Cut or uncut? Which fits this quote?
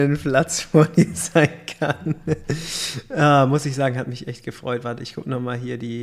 uncut